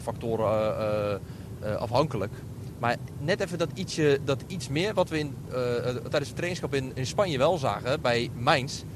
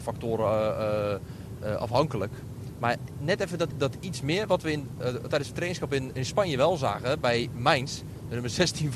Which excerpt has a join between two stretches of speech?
second; 2 cuts; at 3.7 s, 5.0 s

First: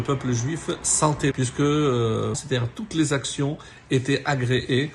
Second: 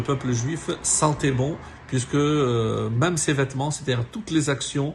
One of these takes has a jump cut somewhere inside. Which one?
first; 2 cuts; at 1.3 s, 2.3 s

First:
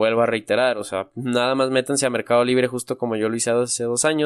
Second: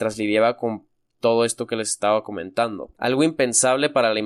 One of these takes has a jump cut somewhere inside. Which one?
second; 1 cut; at 2.9 s

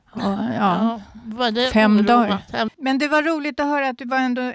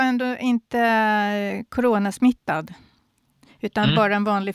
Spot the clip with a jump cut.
first; 1 cut; at 2.7 s

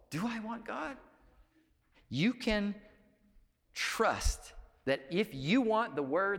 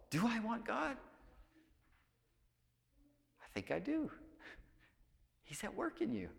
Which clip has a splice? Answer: first; 1 cut; at 1.9 s

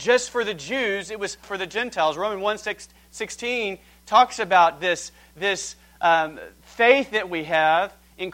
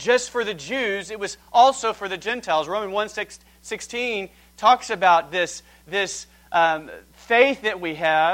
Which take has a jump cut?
first; 1 cut; at 1.4 s

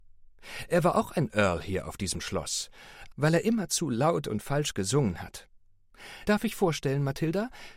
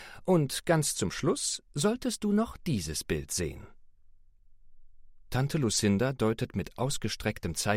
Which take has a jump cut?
first; 2 cuts; at 3.1 s, 6.2 s

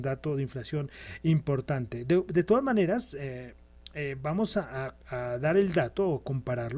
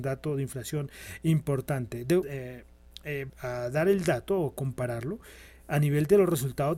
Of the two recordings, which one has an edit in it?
second; 2 cuts; at 2.2 s, 3.3 s

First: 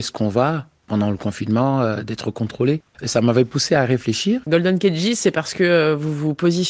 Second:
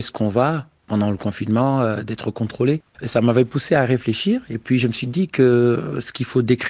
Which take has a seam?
first; 1 cut; at 4.4 s

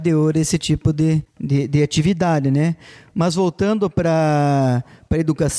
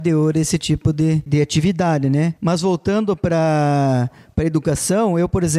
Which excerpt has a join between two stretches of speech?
second; 2 cuts; at 1.3 s, 2.4 s

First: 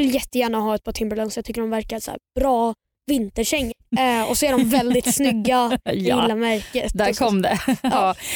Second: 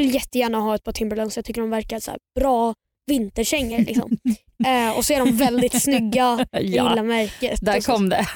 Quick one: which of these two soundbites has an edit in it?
first; 1 cut; at 3.7 s

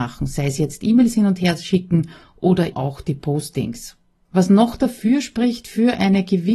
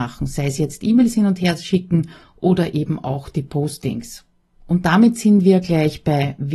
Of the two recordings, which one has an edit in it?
first; 2 cuts; at 2.7 s, 4.2 s

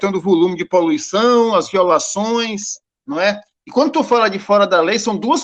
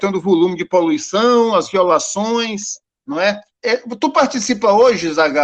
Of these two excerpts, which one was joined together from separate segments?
second; 1 cut; at 3.5 s

